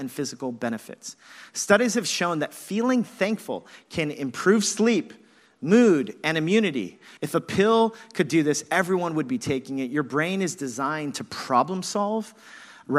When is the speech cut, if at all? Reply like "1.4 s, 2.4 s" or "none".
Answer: 7.2 s